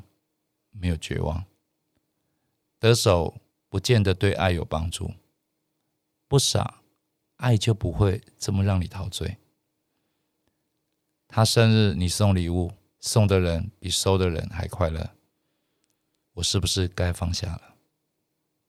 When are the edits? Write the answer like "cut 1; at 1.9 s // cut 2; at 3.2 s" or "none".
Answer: cut 1; at 12.9 s // cut 2; at 16.2 s